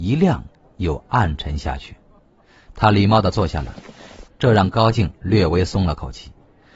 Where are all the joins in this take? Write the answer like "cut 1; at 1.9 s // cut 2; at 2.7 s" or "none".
cut 1; at 4.2 s